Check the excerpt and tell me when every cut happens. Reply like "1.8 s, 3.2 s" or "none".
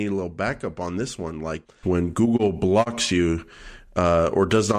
1.8 s